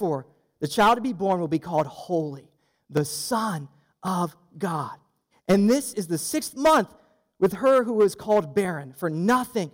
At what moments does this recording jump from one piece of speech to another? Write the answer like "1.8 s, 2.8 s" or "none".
5.3 s